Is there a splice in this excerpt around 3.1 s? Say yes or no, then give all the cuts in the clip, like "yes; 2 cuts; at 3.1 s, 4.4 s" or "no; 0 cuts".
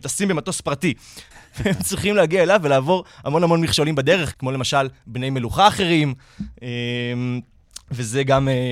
no; 2 cuts; at 1.3 s, 4.3 s